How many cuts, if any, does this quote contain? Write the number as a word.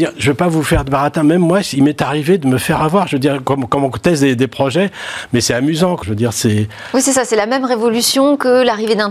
one